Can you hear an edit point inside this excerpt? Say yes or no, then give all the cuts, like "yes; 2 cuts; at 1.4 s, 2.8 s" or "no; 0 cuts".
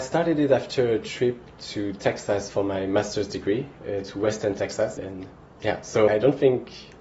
yes; 2 cuts; at 5.0 s, 6.1 s